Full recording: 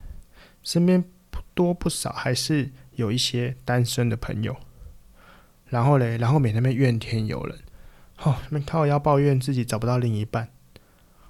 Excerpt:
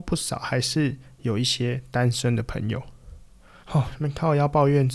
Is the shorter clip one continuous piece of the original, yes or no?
no